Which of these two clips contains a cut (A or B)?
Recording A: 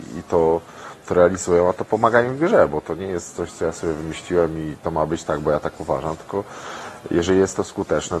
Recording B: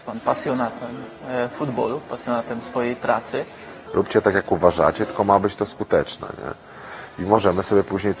B